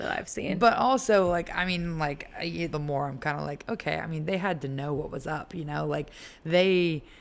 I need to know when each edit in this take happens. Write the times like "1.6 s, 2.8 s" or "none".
2.7 s